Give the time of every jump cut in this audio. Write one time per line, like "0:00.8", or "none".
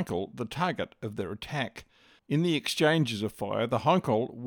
0:02.2